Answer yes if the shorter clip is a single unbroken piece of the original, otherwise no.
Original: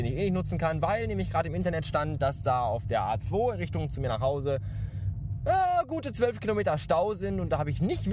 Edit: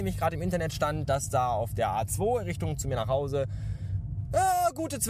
yes